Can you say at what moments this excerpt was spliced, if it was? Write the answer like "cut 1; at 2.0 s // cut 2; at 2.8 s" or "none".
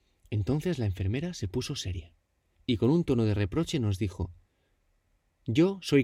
cut 1; at 2.5 s